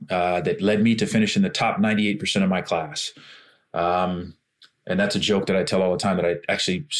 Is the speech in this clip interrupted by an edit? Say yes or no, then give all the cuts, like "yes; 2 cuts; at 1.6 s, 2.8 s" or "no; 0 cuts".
no; 0 cuts